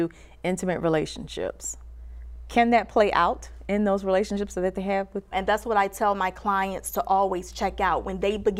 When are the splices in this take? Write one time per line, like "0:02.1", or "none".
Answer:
0:05.3